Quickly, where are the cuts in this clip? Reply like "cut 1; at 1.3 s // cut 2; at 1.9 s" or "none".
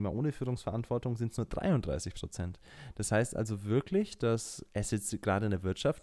none